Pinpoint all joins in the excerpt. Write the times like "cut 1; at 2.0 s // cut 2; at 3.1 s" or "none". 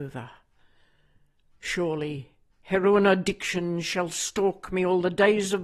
none